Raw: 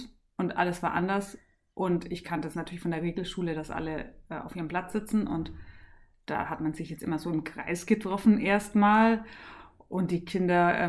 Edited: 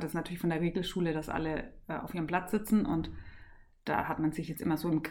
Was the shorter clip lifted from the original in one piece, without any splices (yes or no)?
yes